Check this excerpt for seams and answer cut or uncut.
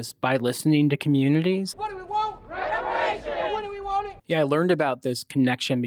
cut